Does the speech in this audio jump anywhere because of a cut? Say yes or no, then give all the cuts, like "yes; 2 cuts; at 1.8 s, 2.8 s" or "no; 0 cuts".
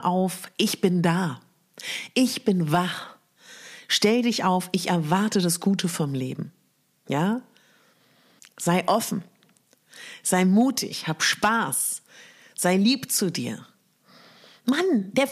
yes; 1 cut; at 8.4 s